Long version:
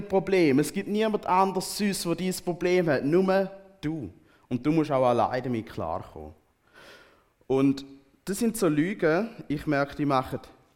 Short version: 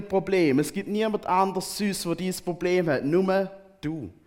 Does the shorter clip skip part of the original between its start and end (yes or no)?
no